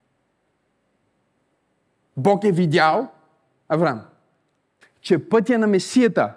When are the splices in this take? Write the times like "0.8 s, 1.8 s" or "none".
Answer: 4.8 s